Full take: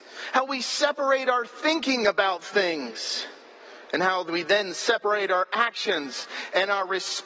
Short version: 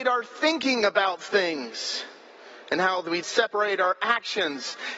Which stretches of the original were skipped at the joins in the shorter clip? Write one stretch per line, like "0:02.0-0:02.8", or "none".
0:04.4-0:04.7